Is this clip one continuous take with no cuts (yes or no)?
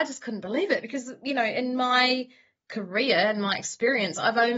yes